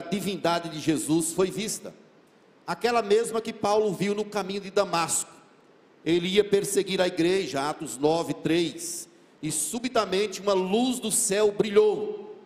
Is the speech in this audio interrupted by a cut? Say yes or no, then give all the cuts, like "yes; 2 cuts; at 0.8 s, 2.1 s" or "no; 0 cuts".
no; 0 cuts